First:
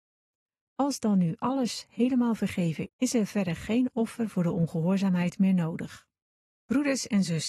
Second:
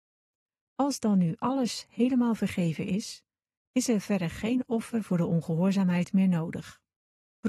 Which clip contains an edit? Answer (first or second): first